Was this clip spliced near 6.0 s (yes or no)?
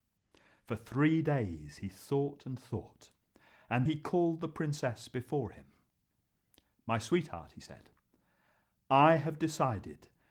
no